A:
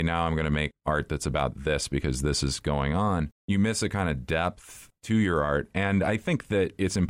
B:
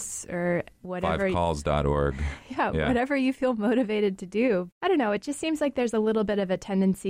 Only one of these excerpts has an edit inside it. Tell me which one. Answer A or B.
B